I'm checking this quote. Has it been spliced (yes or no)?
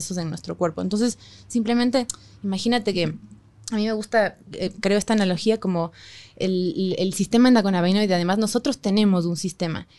no